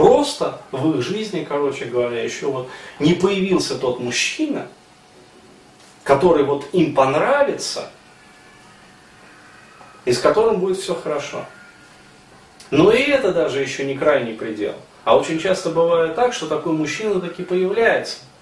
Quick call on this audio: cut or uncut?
uncut